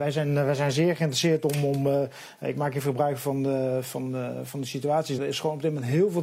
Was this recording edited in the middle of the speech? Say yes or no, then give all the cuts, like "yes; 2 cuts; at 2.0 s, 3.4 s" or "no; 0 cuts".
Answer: yes; 1 cut; at 5.2 s